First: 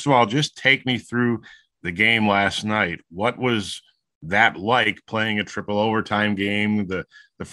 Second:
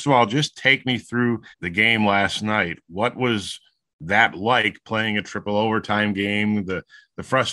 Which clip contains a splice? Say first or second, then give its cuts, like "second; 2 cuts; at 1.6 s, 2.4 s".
second; 1 cut; at 1.5 s